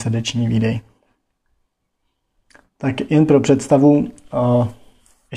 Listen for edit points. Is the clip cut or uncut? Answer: uncut